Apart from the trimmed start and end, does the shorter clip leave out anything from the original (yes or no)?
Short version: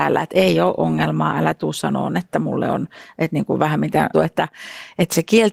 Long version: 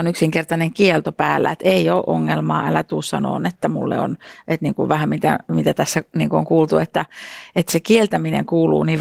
yes